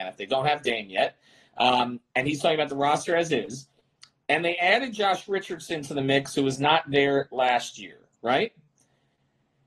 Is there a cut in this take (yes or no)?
no